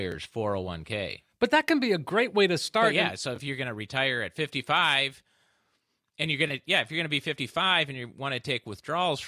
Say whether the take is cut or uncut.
uncut